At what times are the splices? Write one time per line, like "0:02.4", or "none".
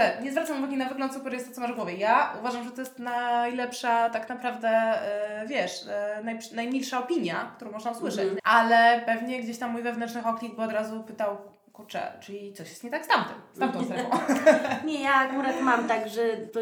0:08.4